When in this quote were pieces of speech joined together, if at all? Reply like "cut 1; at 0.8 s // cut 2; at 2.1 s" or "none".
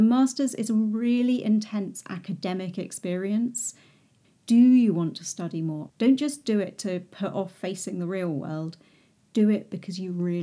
cut 1; at 4.2 s // cut 2; at 5.9 s